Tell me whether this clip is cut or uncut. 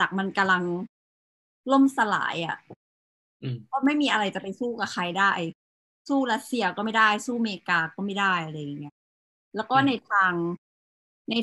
uncut